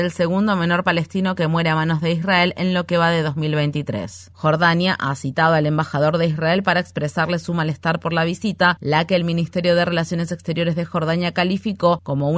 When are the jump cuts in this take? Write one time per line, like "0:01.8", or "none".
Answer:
0:04.3

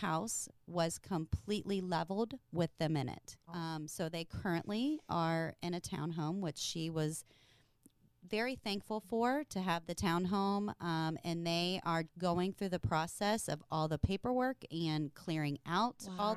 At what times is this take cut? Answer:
0:03.5
0:12.0

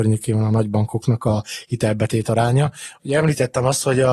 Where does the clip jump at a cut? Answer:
0:03.0

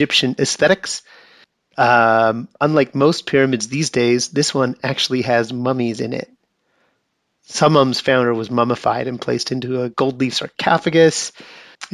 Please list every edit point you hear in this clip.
none

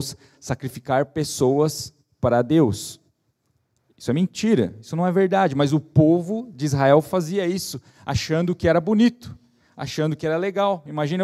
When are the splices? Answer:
none

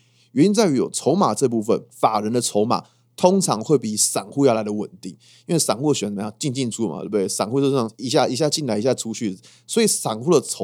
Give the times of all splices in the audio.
0:06.7

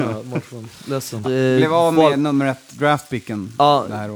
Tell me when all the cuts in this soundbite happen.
0:01.2

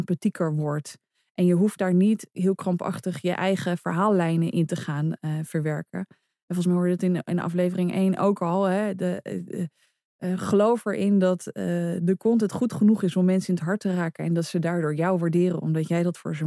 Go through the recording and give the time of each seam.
none

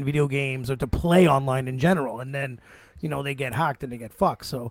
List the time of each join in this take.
none

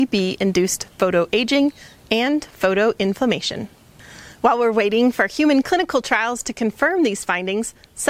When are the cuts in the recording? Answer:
none

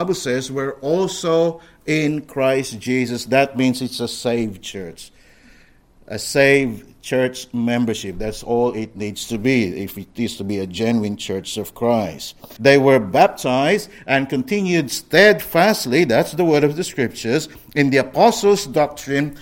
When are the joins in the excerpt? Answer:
0:12.6

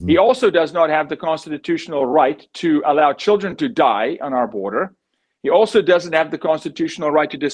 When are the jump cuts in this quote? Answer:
none

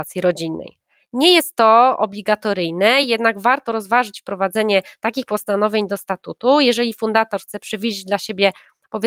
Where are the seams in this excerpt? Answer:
none

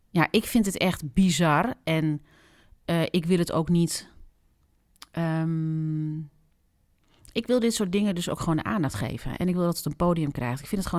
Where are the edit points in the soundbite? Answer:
none

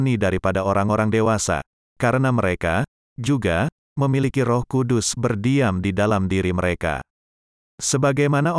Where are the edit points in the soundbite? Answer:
none

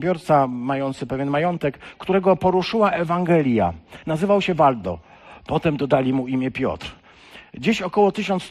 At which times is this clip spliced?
0:04.0

